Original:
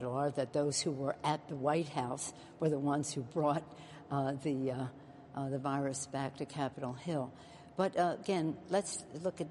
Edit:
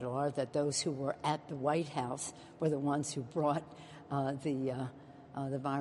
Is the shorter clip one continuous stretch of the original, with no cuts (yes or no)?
yes